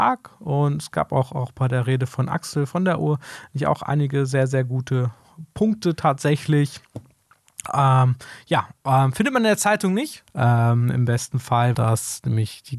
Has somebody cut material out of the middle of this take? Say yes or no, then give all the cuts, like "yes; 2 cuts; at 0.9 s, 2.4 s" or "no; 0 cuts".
yes; 2 cuts; at 10.3 s, 11.7 s